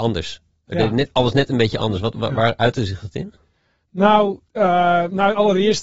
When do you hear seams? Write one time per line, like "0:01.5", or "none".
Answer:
0:04.5